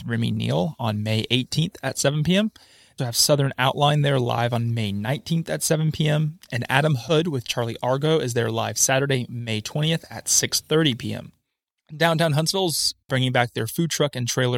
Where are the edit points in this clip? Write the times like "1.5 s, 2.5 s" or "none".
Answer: 3.0 s